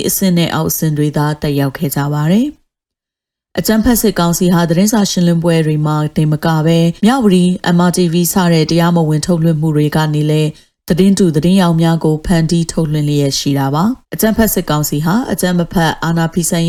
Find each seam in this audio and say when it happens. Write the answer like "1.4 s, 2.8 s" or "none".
7.0 s, 14.0 s